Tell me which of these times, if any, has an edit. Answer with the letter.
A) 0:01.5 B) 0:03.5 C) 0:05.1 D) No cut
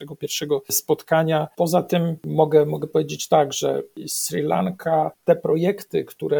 A